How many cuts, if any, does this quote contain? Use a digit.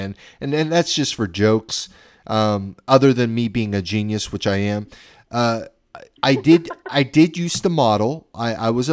0